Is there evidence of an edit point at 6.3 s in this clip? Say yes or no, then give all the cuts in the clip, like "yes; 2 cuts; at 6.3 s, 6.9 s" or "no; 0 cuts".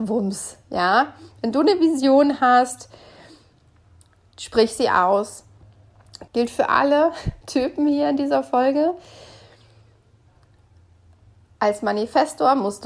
yes; 1 cut; at 6.3 s